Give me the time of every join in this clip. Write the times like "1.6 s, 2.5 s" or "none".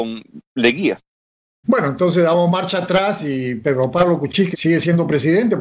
1.6 s, 4.5 s